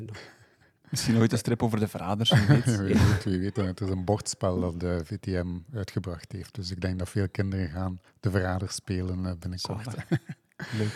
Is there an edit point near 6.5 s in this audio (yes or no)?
no